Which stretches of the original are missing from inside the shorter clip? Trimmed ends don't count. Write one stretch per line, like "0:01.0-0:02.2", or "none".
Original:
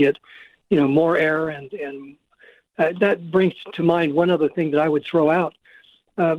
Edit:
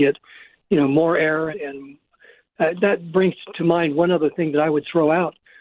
0:01.5-0:01.7